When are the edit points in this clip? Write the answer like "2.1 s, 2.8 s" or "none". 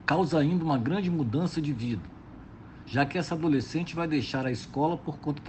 none